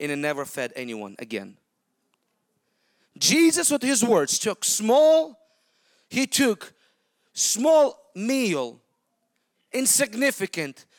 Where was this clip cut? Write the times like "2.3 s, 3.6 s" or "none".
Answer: none